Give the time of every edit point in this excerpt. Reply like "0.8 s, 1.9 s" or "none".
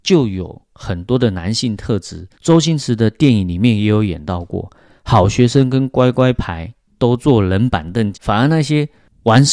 2.3 s, 8.1 s